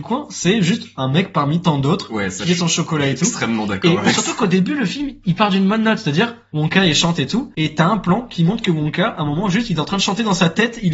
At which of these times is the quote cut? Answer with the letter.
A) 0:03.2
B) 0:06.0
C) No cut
C